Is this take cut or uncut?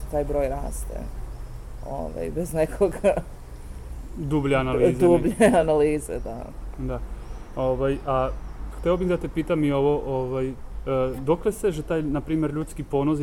uncut